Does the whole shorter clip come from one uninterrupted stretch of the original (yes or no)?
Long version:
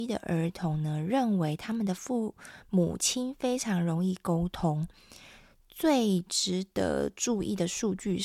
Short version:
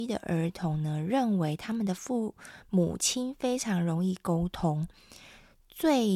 yes